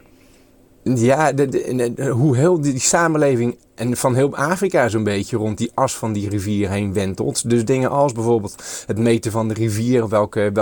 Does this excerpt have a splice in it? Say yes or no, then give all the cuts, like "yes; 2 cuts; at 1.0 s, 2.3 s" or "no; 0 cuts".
no; 0 cuts